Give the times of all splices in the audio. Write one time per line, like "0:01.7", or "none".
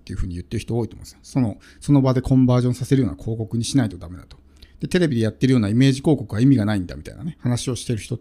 none